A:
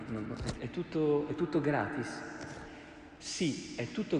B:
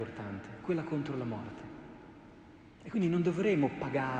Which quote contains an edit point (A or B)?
B